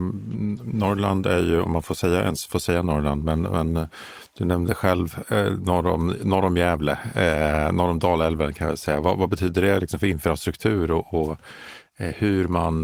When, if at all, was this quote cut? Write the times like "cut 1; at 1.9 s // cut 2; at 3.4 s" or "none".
none

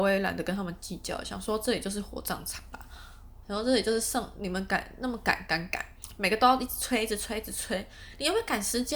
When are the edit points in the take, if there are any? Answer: cut 1; at 3.4 s

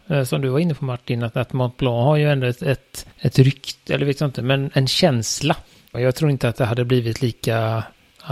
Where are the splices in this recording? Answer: cut 1; at 3.1 s // cut 2; at 5.9 s

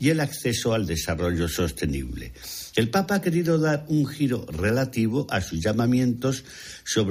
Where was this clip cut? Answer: cut 1; at 2.7 s

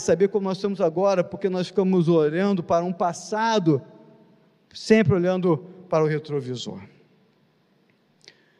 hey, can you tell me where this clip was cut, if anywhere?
none

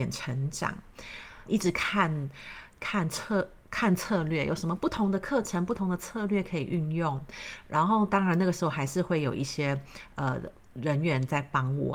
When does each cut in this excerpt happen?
cut 1; at 1.5 s

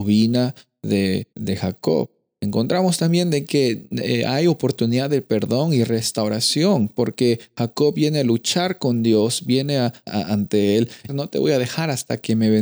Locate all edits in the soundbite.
cut 1; at 1.3 s // cut 2; at 10.1 s // cut 3; at 11.1 s

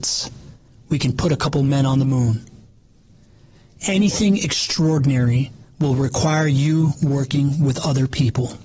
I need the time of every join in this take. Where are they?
none

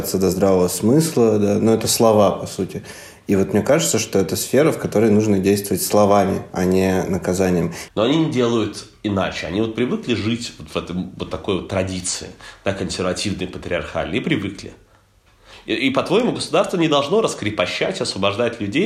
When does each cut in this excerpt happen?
cut 1; at 7.9 s

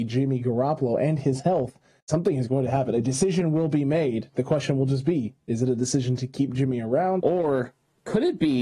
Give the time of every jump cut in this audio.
cut 1; at 2.0 s // cut 2; at 7.2 s

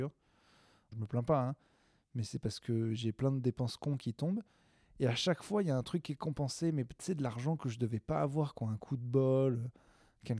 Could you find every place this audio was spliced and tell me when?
cut 1; at 0.9 s

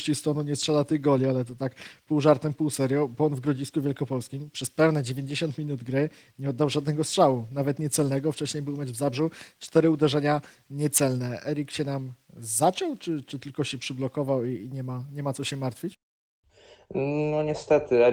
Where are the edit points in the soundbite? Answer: none

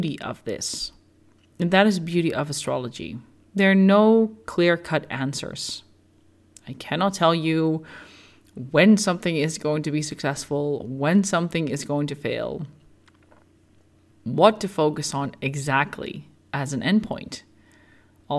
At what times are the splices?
none

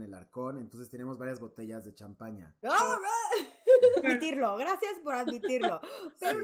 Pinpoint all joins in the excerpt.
cut 1; at 2.6 s // cut 2; at 4.0 s

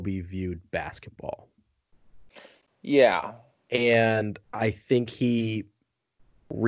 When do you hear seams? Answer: cut 1; at 4.4 s

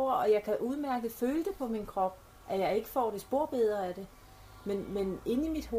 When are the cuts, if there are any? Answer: none

